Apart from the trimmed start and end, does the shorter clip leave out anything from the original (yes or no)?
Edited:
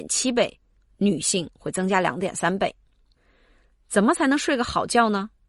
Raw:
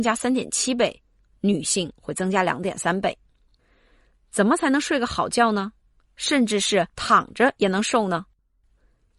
no